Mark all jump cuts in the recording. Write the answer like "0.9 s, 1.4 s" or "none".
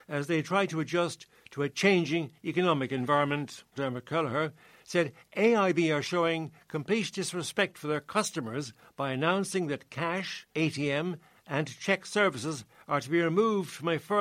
3.7 s, 10.5 s